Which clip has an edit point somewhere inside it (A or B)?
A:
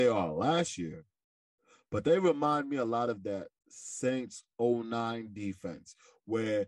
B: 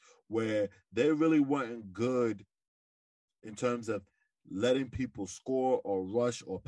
A